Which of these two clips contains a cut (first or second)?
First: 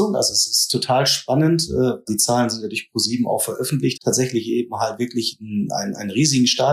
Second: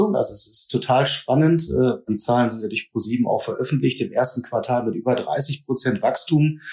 first